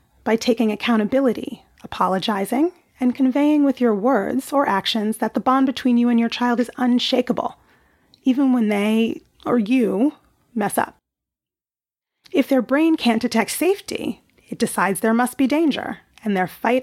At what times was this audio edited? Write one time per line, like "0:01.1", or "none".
0:12.2